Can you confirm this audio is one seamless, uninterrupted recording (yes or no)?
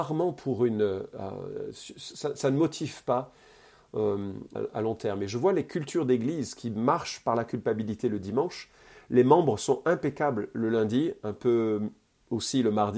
no